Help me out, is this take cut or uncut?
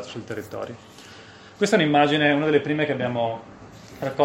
uncut